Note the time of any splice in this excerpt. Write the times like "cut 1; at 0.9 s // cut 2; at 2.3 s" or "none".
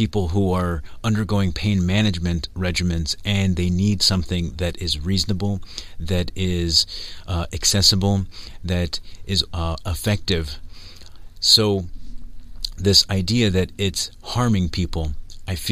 cut 1; at 9.5 s